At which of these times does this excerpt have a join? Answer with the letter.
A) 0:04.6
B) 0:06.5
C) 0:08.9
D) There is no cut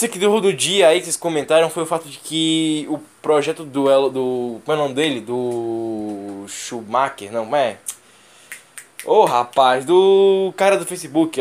D